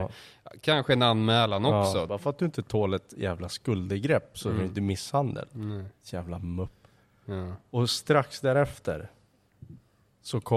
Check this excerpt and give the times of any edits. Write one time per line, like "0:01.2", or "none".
0:02.1